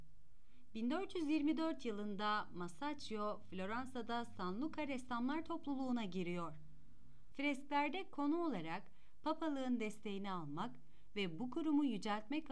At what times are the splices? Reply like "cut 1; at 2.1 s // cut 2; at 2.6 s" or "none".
cut 1; at 7.3 s

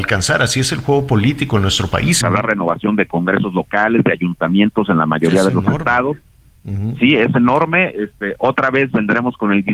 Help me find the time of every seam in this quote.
cut 1; at 2.2 s

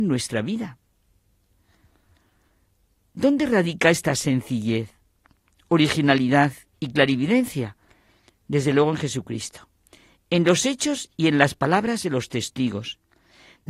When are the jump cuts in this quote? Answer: none

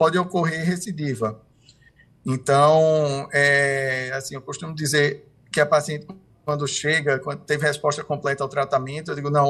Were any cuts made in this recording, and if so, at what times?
none

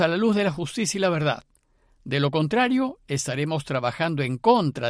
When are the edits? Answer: none

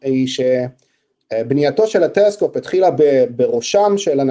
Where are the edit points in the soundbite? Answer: none

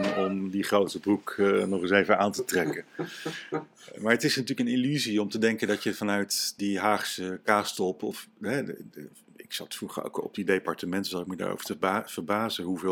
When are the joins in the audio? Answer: cut 1; at 8.9 s

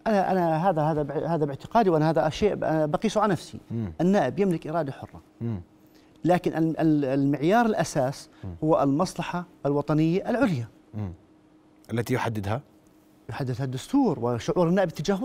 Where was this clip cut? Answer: none

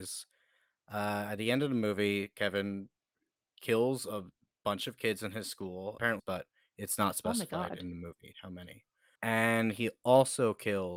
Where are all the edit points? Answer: cut 1; at 6.2 s

